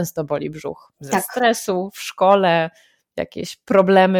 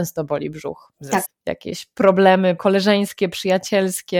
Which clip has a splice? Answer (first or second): second